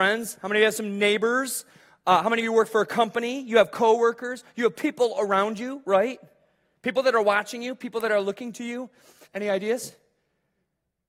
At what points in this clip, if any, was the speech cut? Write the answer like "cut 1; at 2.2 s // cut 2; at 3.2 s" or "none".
cut 1; at 9.3 s